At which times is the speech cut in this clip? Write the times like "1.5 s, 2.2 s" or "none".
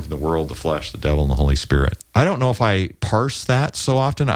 2.0 s